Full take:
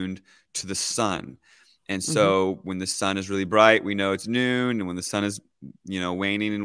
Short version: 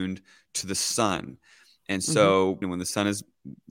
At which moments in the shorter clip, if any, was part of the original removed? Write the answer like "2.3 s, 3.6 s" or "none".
2.6 s